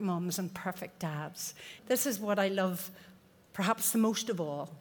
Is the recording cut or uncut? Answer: cut